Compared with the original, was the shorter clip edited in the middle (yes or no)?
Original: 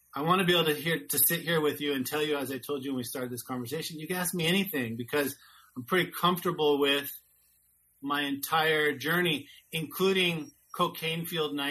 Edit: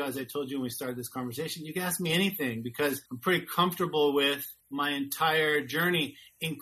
yes